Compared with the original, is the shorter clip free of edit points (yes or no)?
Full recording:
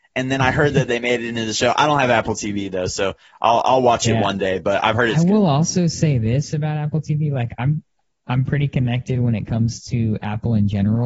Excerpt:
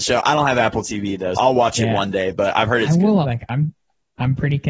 no